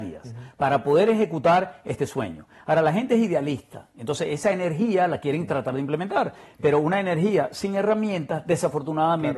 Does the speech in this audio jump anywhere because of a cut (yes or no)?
no